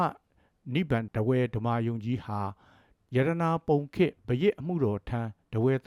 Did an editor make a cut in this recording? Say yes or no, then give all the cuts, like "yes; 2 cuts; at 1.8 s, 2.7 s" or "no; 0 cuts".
yes; 1 cut; at 1.1 s